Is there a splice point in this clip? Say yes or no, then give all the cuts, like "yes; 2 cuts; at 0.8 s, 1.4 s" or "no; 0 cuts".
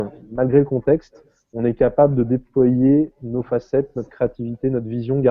no; 0 cuts